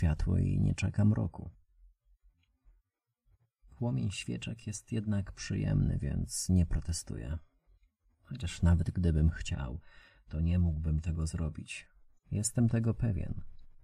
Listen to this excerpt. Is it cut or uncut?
cut